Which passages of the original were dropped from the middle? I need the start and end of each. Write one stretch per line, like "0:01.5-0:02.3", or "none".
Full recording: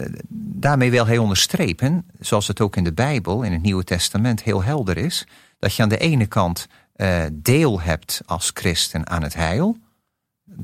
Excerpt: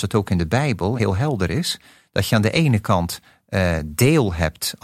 0:03.4-0:04.4